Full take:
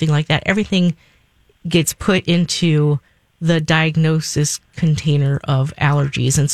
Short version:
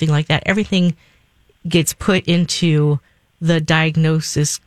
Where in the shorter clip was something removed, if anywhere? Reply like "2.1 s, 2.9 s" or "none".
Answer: none